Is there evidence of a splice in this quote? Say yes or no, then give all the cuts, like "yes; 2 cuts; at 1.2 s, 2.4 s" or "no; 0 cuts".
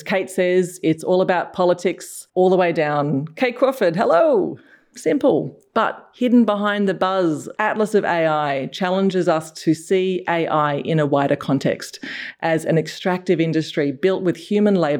yes; 2 cuts; at 4.9 s, 7.5 s